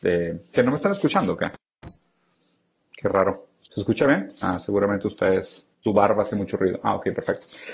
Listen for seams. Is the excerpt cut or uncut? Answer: cut